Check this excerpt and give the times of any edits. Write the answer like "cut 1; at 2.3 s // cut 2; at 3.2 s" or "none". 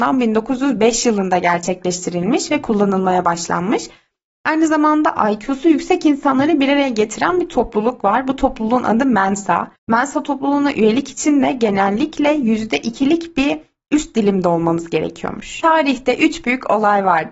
cut 1; at 9.8 s